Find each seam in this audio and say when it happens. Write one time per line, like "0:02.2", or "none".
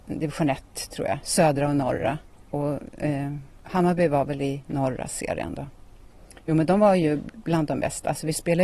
none